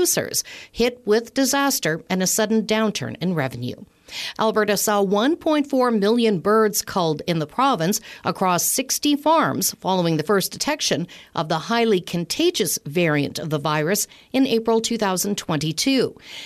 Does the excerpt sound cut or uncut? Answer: cut